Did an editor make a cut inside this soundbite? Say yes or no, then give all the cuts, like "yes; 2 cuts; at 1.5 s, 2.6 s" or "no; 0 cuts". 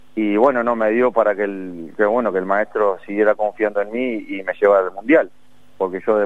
no; 0 cuts